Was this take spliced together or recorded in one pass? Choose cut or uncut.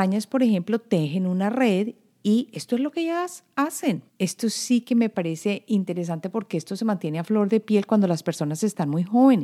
cut